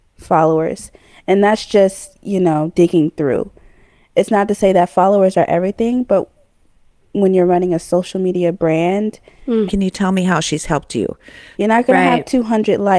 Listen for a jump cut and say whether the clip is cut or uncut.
cut